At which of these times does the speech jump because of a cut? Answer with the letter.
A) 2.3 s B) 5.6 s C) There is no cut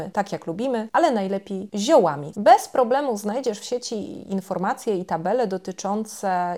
A